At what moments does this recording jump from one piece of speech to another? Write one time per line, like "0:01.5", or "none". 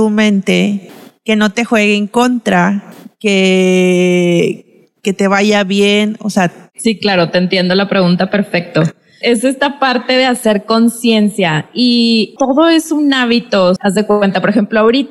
0:09.2
0:12.4
0:13.8